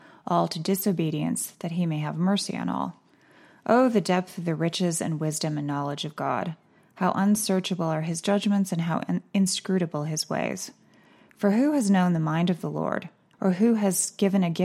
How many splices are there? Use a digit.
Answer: 1